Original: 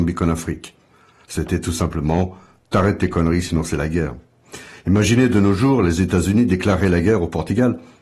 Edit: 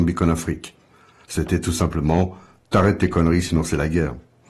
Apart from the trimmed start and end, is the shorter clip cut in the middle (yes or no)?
no